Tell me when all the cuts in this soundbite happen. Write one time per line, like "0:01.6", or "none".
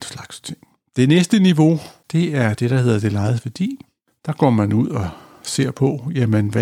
0:02.0